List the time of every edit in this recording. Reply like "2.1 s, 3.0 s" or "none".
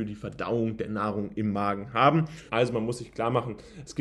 2.5 s

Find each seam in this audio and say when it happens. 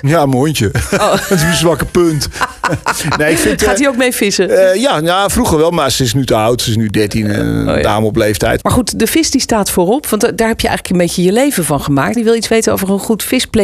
8.6 s, 12.2 s

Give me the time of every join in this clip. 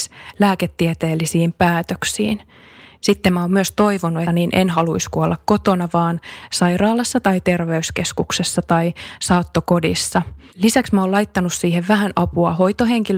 4.3 s, 10.5 s

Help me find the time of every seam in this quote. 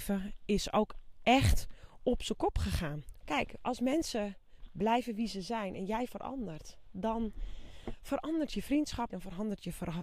3.2 s, 9.1 s

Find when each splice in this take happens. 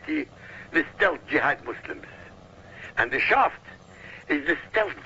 2.9 s

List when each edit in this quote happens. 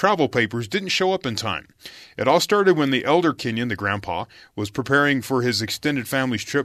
none

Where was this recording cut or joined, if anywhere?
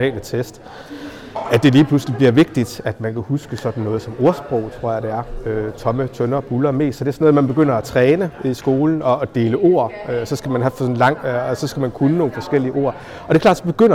none

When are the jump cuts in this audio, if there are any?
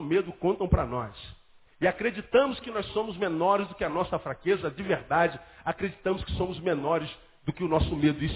1.7 s

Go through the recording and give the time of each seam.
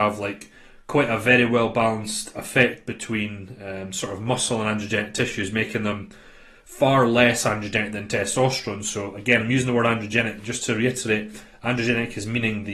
none

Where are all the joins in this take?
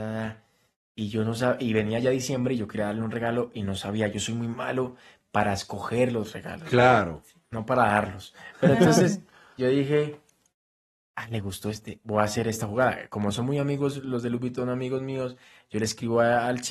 none

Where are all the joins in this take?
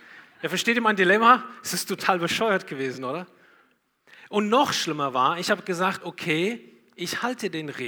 none

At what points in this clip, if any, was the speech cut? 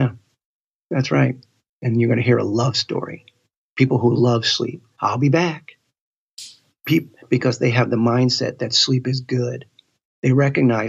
1.7 s, 5.0 s

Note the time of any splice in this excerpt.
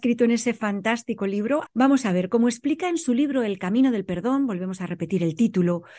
1.6 s

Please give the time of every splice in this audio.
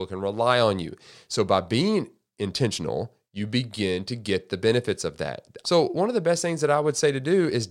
1.1 s, 5.6 s

